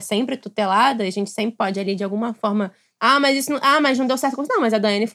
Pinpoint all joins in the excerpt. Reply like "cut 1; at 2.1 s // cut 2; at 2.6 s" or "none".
cut 1; at 3.0 s